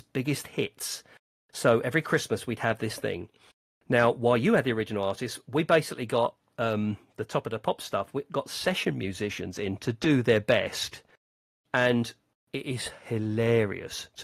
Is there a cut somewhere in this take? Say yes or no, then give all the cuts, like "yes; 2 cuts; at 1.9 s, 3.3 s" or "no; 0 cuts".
no; 0 cuts